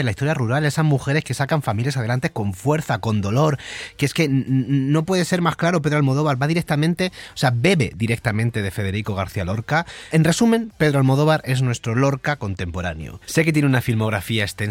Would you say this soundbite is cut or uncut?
uncut